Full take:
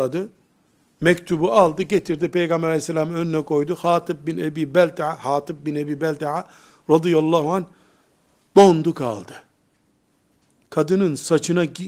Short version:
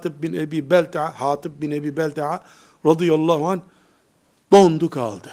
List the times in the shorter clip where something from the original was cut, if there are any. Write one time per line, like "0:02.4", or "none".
none

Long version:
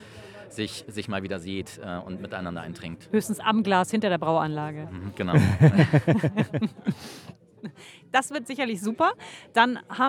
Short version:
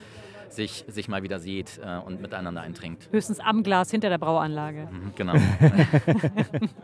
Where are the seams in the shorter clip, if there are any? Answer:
none

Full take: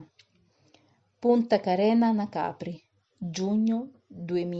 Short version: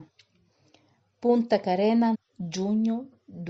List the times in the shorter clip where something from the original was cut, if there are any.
0:02.1

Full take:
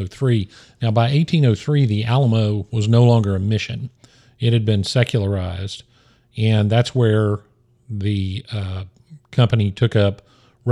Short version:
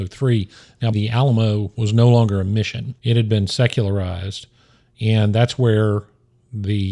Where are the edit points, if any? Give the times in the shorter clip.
0:00.9
0:03.0

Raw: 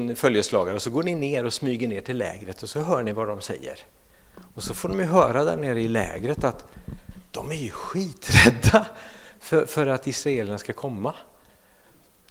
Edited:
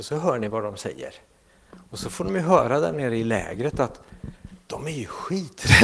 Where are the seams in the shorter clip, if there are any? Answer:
none

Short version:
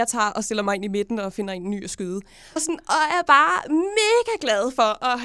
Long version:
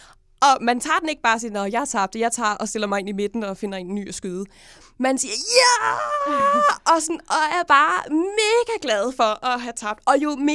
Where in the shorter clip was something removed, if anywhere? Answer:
0:02.6

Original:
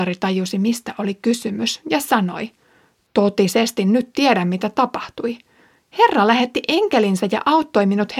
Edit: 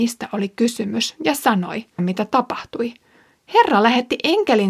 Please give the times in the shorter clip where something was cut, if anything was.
0:02.0

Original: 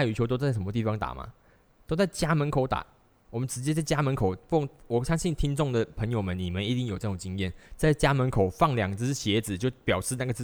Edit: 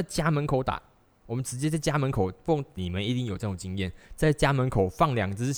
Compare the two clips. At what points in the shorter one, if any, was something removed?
0:02.8

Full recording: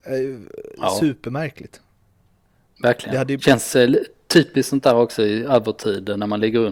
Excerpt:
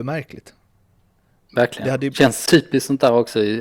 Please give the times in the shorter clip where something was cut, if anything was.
0:02.5

